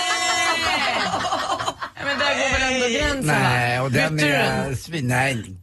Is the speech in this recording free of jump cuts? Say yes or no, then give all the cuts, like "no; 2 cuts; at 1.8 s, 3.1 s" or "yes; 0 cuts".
yes; 0 cuts